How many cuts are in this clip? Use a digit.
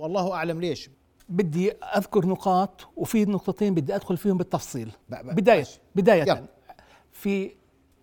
1